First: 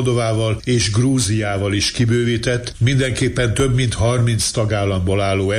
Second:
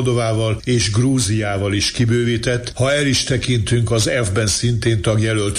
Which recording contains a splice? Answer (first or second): second